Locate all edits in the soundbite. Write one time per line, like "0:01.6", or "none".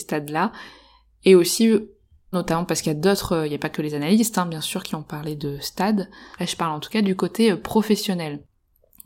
0:02.3
0:06.3

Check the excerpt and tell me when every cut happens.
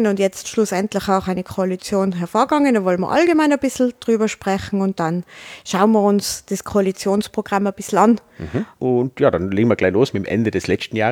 0:08.8

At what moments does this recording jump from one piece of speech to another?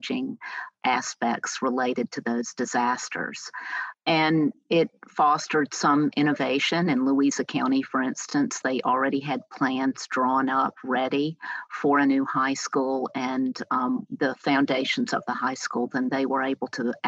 0:08.6
0:14.1

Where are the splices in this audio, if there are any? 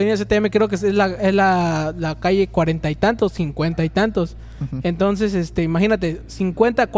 none

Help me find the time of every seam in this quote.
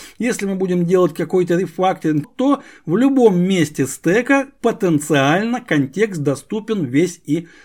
0:02.2

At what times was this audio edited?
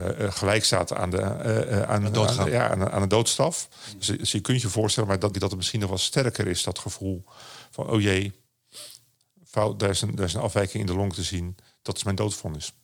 0:05.3

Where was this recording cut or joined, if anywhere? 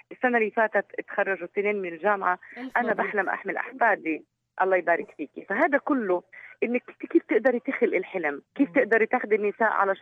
0:08.5

